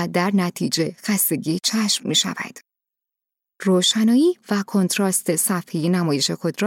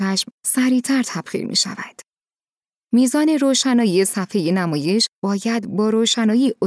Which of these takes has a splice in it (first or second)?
second